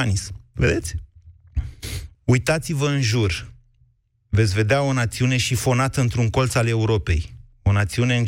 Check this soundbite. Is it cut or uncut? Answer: cut